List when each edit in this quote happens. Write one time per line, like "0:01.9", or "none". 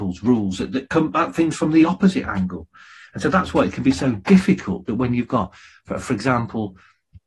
none

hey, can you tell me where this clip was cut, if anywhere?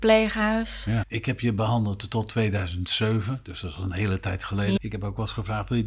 0:01.0
0:04.8

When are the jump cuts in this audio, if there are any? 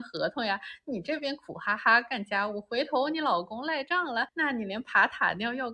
none

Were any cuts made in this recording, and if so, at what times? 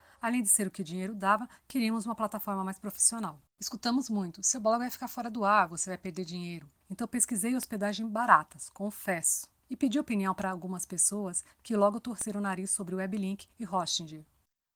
0:03.5
0:06.8

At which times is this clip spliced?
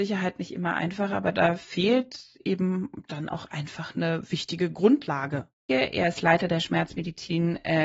0:05.7

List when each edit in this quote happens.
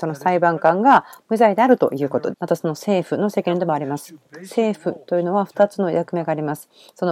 0:02.3

